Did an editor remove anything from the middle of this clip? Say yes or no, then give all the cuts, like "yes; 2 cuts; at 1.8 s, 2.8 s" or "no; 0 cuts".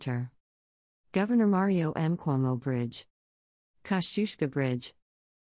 no; 0 cuts